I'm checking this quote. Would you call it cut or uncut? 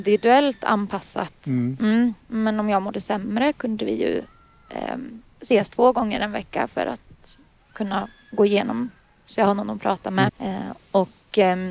cut